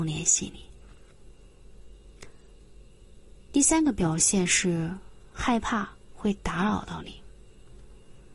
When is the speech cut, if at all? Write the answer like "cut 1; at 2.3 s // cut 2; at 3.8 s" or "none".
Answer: none